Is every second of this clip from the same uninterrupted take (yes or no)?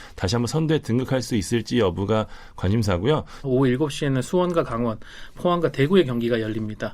no